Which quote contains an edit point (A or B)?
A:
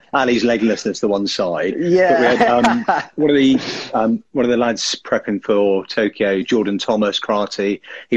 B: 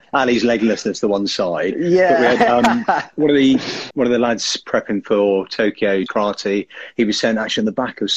B